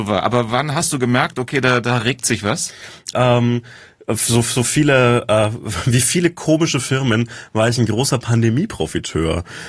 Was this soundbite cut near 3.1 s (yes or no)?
yes